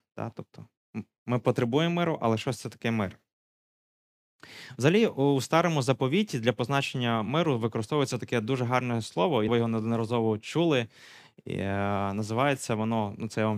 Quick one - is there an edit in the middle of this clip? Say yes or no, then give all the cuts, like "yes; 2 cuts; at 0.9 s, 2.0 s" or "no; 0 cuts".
yes; 1 cut; at 9.5 s